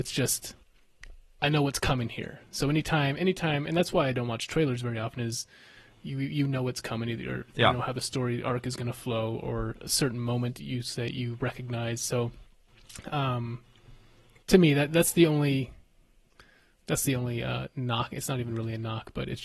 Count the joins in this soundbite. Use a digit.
0